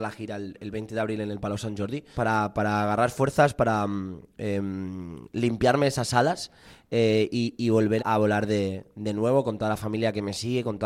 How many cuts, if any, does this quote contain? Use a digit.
2